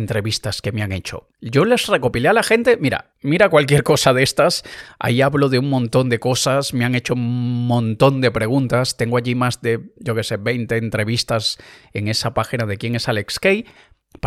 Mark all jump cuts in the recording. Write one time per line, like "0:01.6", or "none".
none